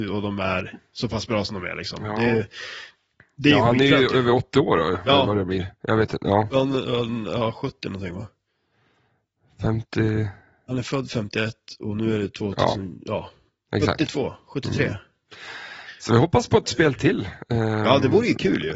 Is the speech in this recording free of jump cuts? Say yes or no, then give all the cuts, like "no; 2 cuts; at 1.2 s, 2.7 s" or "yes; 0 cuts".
yes; 0 cuts